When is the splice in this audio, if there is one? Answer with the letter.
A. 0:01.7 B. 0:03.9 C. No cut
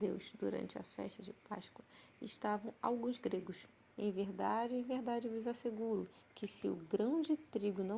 B